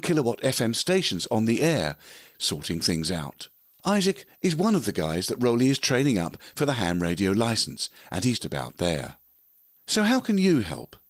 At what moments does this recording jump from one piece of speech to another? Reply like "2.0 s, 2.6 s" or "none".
2.3 s, 8.4 s